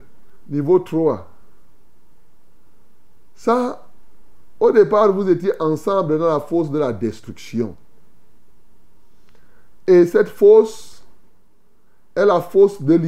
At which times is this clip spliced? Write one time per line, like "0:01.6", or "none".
none